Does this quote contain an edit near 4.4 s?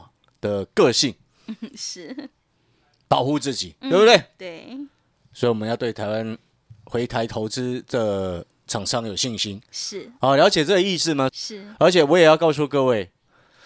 no; 1 cut; at 11.3 s

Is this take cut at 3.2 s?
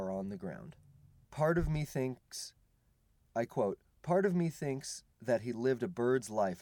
no; 2 cuts; at 1.2 s, 5.1 s

